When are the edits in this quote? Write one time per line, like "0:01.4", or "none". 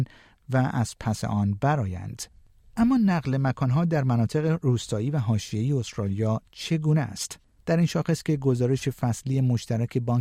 0:07.6